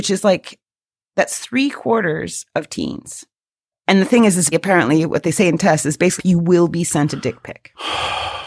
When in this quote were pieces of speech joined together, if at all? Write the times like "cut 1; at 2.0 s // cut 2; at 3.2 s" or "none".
cut 1; at 4.5 s // cut 2; at 6.2 s